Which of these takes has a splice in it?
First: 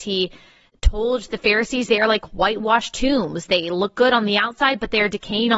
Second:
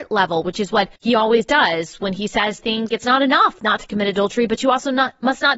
second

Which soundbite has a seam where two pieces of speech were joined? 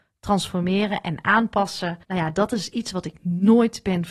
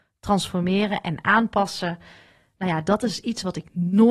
first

